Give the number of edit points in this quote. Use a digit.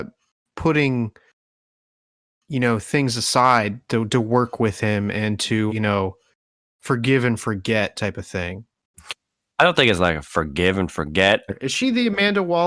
2